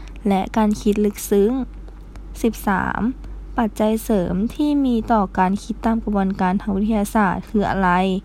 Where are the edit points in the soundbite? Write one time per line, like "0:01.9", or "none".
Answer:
none